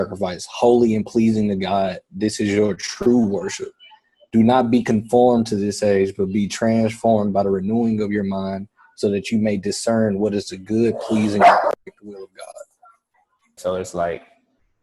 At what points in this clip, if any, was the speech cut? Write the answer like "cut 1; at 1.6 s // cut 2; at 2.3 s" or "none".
cut 1; at 13.6 s